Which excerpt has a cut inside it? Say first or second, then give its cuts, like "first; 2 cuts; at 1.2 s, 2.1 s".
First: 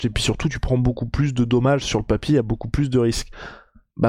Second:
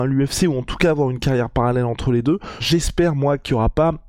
second; 1 cut; at 2.6 s